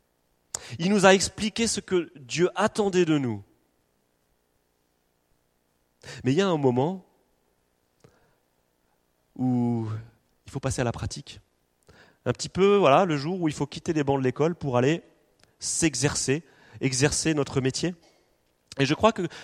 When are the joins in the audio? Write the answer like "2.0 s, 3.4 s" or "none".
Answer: none